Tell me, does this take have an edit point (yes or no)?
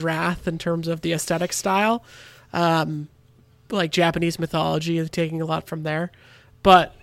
no